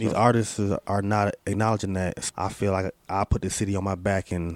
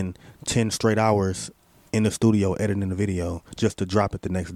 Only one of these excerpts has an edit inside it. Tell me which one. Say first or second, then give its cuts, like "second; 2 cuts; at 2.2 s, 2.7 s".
first; 1 cut; at 2.3 s